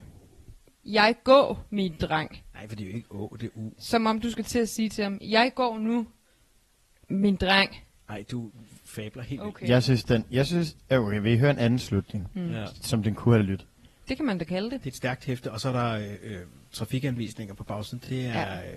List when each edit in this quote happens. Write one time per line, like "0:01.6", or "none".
0:14.0